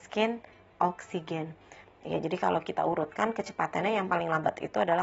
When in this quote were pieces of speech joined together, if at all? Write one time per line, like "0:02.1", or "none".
0:01.8